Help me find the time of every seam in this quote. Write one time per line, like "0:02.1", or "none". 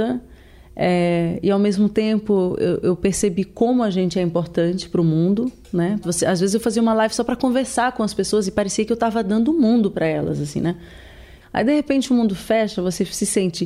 0:06.0
0:11.4

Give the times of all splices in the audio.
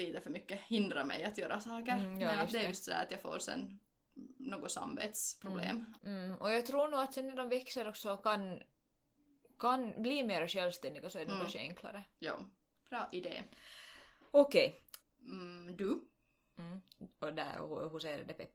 0:06.0
0:12.8
0:15.0

